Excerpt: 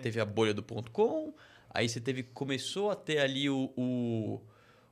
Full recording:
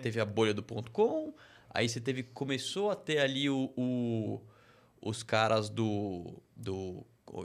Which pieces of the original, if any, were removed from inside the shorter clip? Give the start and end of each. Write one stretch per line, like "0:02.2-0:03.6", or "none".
none